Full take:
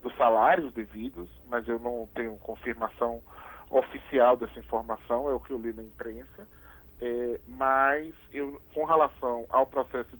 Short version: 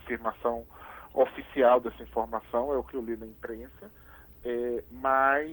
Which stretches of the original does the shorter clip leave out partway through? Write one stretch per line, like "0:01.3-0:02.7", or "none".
none